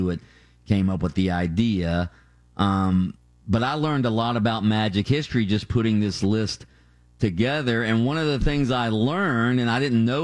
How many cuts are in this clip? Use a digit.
0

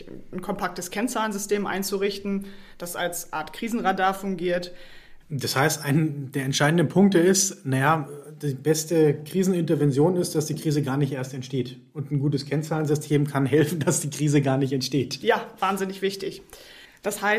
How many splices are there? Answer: 1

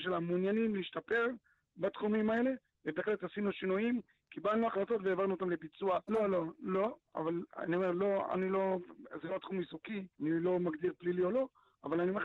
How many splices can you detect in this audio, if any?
2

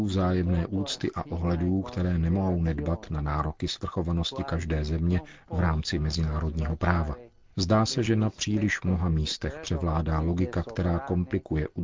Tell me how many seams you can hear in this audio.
0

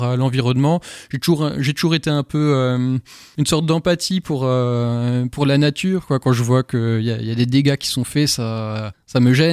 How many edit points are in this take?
0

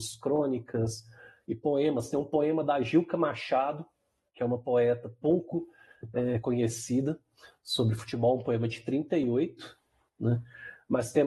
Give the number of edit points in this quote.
0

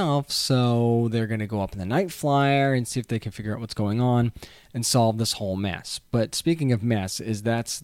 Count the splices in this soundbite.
0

